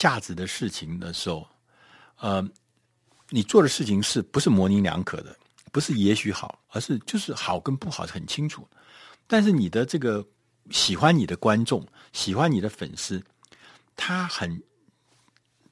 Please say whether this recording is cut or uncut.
cut